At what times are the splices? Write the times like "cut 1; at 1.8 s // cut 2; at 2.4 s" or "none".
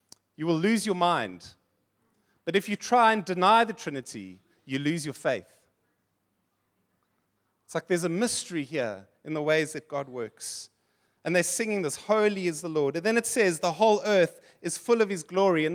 none